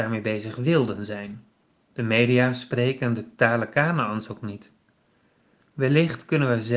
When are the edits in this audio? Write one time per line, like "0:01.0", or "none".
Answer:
0:05.6